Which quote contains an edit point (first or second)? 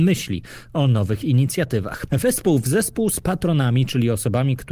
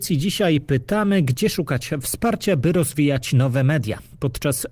first